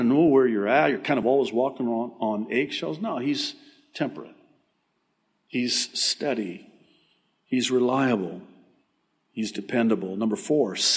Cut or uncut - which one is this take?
uncut